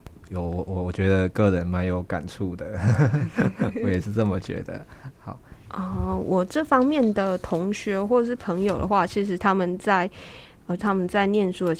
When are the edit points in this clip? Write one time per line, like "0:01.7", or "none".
0:05.6
0:10.8